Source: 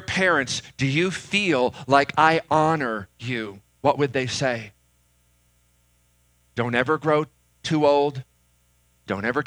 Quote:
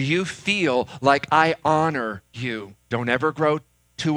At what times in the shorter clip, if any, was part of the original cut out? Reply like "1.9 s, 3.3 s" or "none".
2.8 s